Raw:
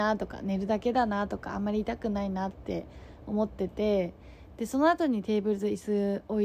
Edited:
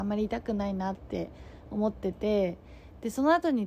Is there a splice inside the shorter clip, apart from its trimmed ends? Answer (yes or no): no